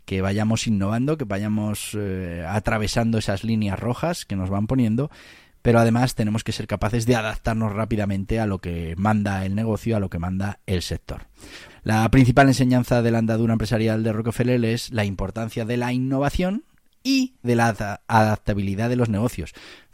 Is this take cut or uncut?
cut